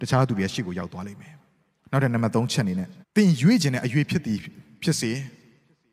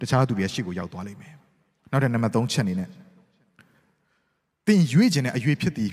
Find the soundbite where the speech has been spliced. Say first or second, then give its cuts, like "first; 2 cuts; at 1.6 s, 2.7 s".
first; 1 cut; at 3.0 s